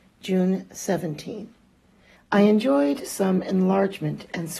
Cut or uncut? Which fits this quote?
cut